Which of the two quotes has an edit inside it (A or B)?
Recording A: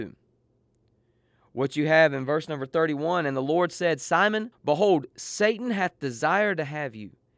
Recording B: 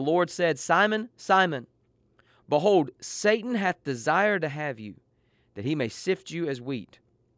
A